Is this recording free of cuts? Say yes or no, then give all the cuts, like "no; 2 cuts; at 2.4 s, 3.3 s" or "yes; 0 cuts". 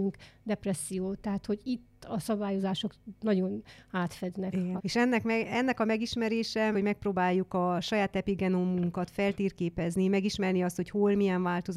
no; 2 cuts; at 4.8 s, 6.7 s